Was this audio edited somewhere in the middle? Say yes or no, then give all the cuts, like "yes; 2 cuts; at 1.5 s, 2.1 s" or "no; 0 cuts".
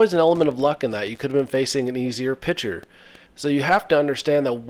yes; 1 cut; at 3.3 s